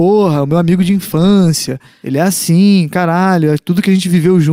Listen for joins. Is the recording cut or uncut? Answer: uncut